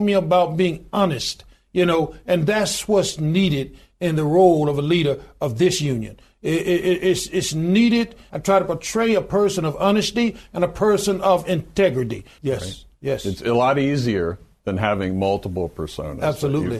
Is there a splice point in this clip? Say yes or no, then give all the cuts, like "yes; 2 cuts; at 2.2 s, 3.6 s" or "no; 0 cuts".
yes; 2 cuts; at 8.3 s, 12.4 s